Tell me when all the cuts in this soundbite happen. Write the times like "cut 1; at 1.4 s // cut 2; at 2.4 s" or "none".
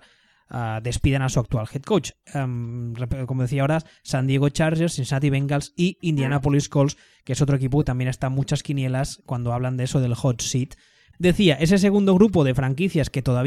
cut 1; at 11.1 s